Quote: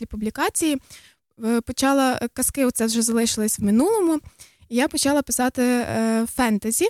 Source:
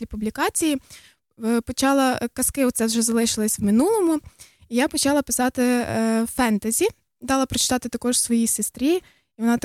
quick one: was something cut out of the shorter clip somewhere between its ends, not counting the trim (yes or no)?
no